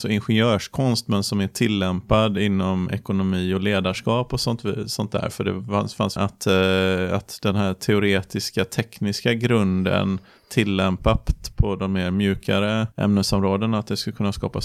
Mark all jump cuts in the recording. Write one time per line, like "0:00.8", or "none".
0:06.2
0:12.9